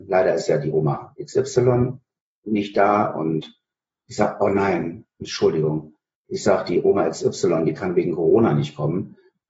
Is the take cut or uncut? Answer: uncut